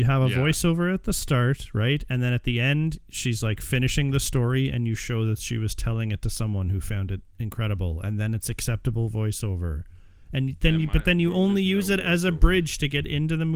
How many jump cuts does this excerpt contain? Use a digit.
0